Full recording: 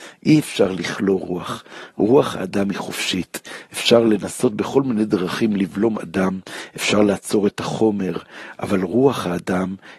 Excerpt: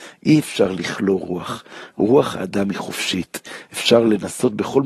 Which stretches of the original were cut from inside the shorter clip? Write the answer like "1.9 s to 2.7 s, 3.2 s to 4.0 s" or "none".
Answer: none